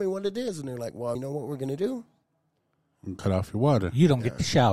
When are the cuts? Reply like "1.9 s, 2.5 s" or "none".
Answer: 1.2 s